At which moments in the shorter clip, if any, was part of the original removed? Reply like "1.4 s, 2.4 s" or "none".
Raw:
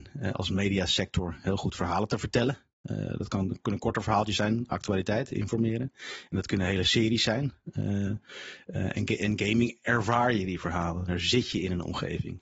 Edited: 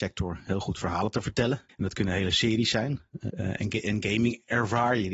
1.7 s, 3.3 s